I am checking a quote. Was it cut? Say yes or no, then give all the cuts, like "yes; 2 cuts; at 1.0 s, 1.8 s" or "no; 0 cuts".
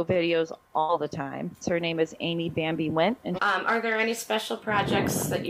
yes; 2 cuts; at 1.6 s, 3.4 s